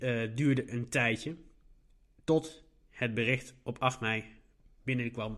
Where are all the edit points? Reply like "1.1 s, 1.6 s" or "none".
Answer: none